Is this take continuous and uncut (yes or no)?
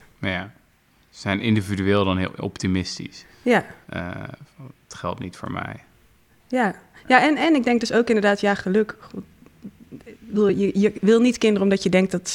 yes